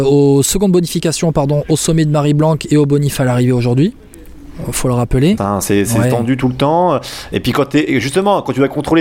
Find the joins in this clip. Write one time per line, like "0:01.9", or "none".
0:05.4